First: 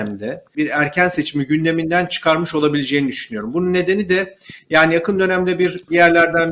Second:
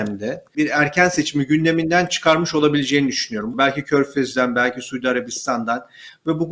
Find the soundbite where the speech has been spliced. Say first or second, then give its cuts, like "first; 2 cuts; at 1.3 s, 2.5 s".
second; 1 cut; at 3.5 s